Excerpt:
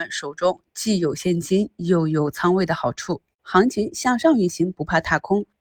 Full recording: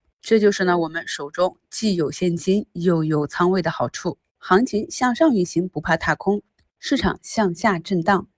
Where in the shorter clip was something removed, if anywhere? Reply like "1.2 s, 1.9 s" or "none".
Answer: none